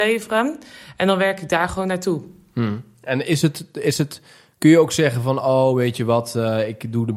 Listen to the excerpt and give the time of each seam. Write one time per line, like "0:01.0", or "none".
none